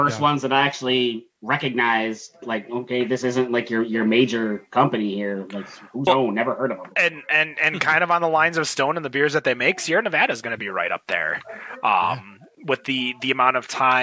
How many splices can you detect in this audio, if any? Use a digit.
1